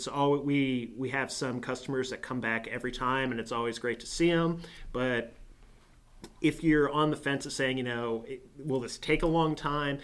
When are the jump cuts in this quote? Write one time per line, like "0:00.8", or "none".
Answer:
none